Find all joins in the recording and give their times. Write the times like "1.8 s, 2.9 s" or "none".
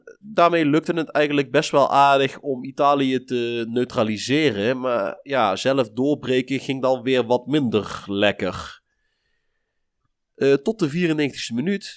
none